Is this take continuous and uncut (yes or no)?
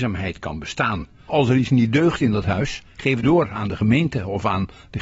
no